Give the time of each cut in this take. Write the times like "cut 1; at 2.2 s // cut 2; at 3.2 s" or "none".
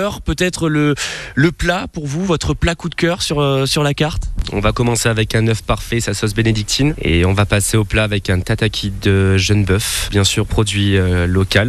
none